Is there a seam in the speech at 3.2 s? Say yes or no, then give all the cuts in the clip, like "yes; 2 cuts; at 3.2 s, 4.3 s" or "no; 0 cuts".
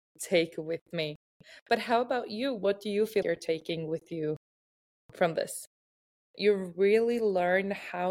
yes; 2 cuts; at 3.2 s, 6.3 s